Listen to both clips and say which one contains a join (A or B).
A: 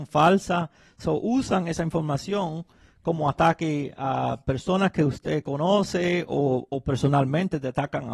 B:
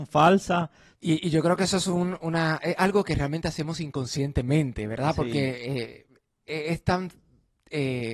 B